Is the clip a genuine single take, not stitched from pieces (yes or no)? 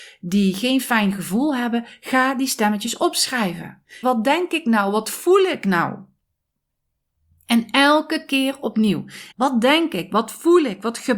no